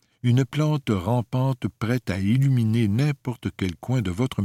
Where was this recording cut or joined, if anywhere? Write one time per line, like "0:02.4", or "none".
none

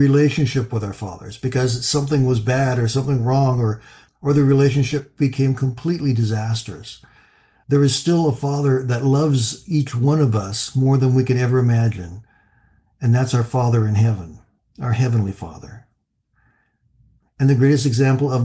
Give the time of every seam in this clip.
0:17.3

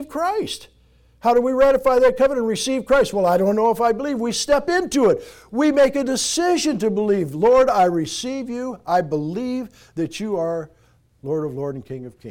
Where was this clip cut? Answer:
none

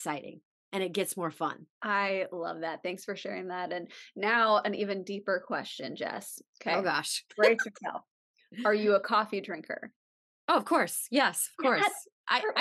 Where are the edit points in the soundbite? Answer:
0:01.7

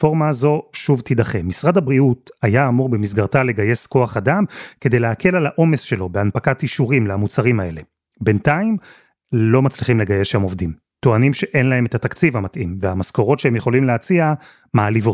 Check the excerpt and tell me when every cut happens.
none

